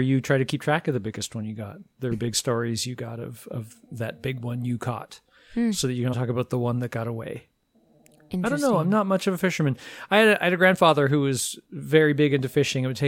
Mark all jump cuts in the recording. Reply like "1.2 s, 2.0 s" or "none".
2.1 s, 6.1 s